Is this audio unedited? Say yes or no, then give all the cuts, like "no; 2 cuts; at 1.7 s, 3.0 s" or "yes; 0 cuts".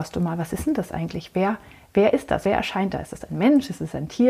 yes; 0 cuts